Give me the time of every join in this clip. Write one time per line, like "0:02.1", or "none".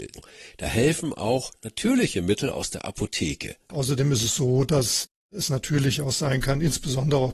0:03.7